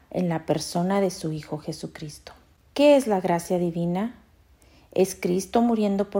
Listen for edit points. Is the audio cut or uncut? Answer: uncut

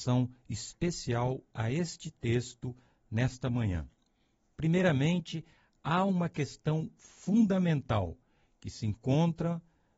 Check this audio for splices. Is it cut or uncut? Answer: uncut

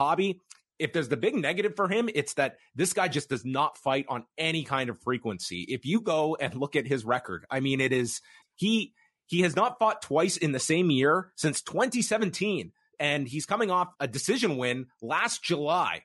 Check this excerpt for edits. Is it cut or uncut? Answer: cut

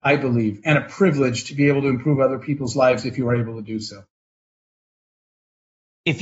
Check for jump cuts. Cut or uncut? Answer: uncut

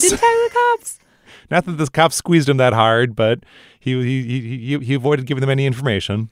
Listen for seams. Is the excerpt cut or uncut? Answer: uncut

